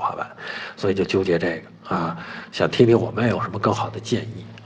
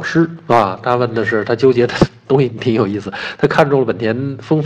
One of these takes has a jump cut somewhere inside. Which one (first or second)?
second